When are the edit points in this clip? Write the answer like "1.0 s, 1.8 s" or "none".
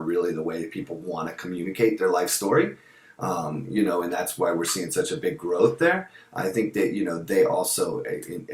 none